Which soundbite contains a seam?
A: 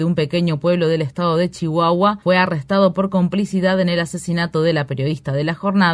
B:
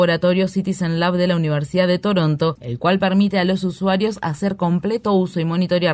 B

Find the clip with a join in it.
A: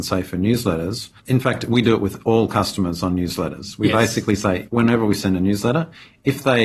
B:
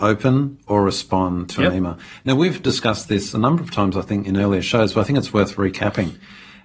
A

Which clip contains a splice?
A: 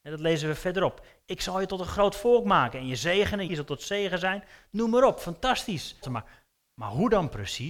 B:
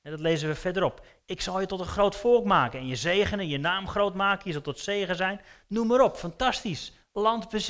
A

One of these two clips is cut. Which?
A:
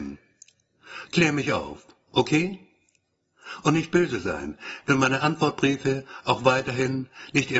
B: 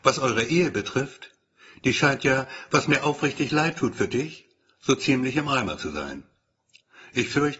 A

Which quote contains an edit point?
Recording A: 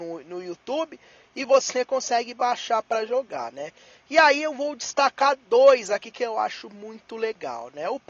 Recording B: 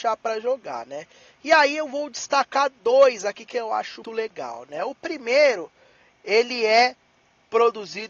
B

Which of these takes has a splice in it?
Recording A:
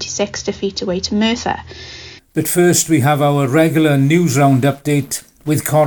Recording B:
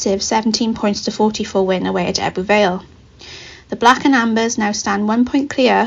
A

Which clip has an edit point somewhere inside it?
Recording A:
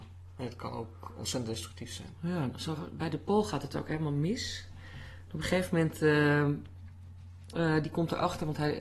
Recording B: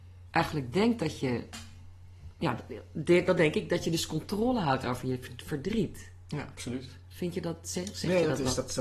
A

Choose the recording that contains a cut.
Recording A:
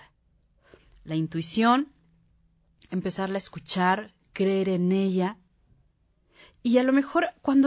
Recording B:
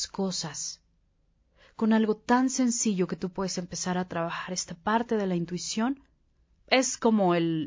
B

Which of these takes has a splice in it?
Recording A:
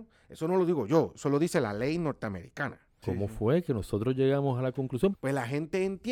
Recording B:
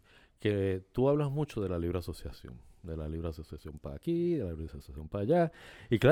A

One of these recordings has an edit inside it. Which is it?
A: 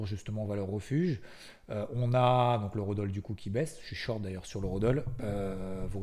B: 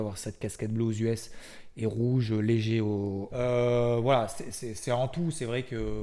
B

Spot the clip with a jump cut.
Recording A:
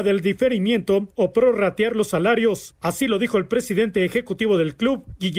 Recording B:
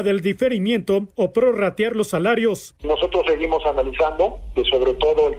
B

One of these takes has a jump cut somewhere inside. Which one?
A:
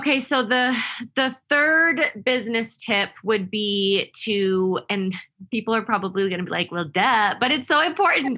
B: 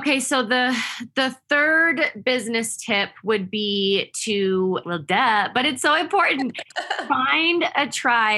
B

